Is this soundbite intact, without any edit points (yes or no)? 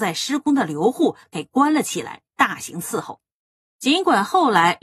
yes